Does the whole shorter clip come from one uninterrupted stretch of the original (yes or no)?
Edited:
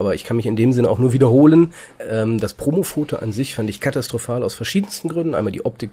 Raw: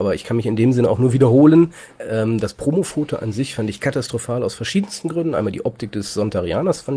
yes